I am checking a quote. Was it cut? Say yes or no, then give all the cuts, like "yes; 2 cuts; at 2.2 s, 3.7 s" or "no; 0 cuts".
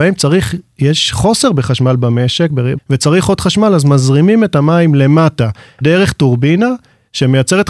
yes; 2 cuts; at 2.8 s, 5.8 s